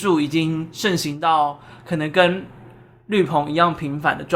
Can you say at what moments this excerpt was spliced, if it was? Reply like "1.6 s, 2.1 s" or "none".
none